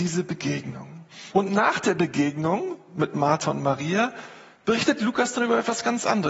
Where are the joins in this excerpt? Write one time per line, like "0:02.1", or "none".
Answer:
0:01.3